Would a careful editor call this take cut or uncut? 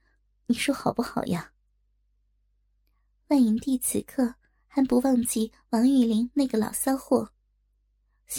uncut